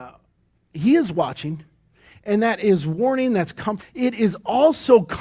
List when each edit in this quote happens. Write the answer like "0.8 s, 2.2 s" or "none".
3.8 s